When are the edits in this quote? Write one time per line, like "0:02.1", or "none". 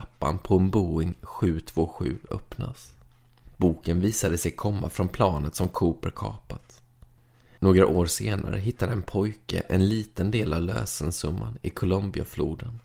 none